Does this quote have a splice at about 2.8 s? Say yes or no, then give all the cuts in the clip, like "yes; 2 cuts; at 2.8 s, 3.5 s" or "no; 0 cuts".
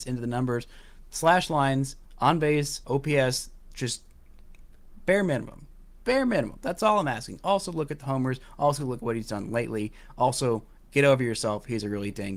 yes; 1 cut; at 2.8 s